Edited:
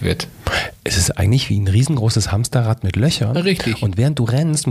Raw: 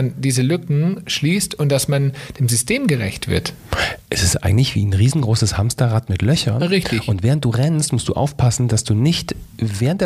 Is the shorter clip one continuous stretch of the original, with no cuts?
yes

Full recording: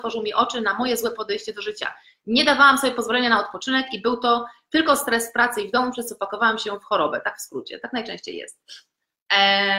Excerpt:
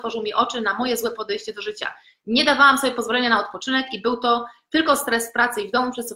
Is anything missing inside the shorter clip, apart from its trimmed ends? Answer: no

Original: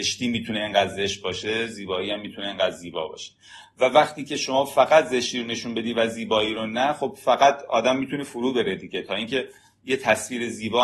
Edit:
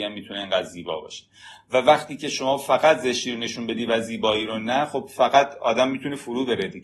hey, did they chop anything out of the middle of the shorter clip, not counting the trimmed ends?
no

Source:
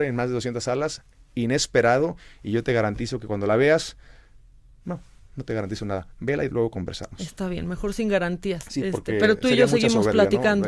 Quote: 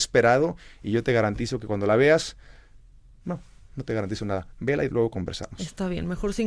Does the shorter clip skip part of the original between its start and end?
no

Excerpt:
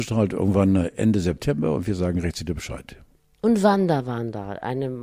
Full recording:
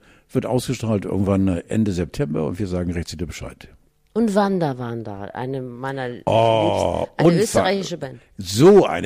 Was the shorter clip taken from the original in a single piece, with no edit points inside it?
yes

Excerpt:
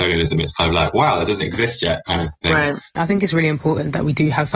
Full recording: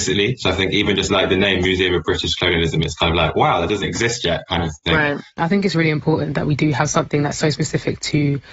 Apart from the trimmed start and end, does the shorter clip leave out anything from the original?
no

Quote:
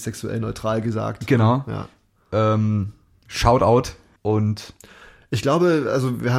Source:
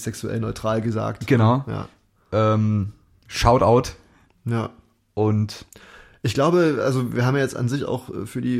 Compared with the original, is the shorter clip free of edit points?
no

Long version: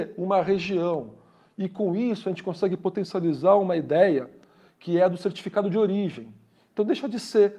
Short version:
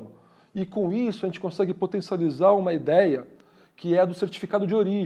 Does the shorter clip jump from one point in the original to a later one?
no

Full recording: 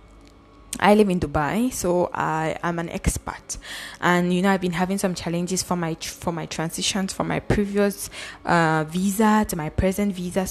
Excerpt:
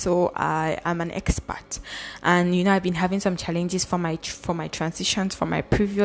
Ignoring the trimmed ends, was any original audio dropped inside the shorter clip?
no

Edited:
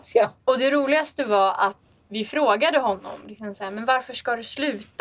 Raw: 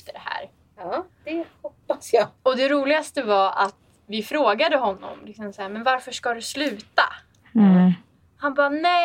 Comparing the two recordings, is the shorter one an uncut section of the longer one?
yes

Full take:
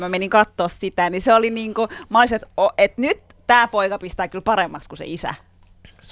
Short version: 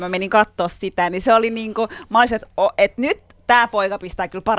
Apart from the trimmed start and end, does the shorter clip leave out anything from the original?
no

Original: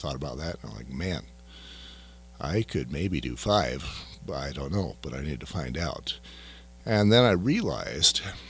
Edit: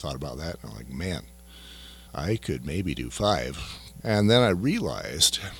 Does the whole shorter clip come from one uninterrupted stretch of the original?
no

